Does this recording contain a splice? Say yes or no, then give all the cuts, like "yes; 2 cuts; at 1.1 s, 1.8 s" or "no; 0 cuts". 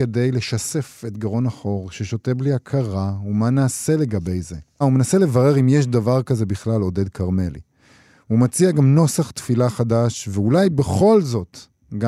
yes; 1 cut; at 4.8 s